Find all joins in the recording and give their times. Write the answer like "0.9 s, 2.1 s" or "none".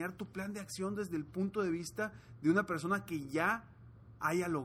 none